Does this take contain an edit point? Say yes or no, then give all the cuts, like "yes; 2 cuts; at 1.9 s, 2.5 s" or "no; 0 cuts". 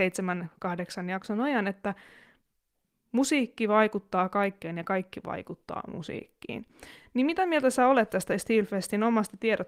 no; 0 cuts